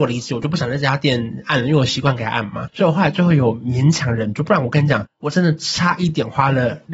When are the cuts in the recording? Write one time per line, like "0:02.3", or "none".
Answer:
none